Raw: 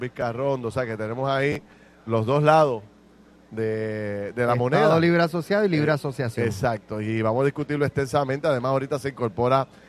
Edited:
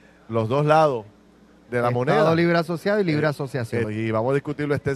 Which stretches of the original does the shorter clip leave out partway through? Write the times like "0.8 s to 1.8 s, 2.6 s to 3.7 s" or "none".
3.5 s to 4.3 s, 6.5 s to 7.0 s